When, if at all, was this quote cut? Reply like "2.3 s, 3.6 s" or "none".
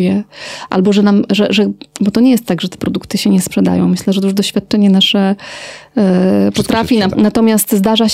7.1 s